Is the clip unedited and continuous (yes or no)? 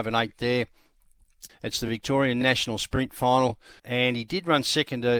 no